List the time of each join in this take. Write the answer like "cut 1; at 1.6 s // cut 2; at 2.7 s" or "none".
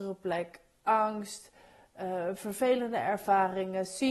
none